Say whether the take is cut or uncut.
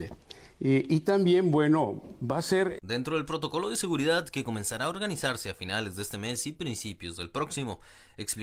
cut